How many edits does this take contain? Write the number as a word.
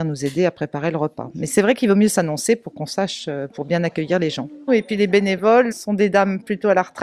two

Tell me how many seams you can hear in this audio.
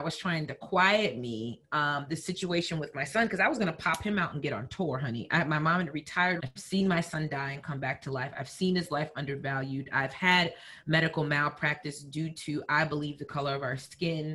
one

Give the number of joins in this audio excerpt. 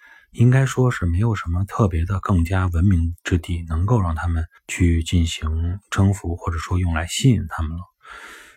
one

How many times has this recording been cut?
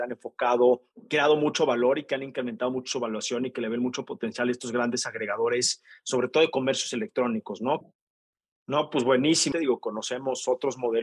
two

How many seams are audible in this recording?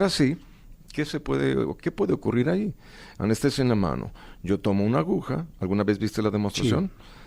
one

